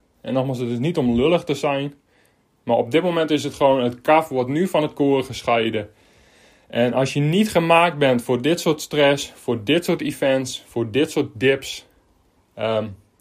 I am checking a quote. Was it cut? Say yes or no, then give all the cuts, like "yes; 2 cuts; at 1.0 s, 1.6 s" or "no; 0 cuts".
no; 0 cuts